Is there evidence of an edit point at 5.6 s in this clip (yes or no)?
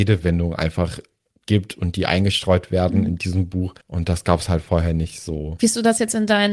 no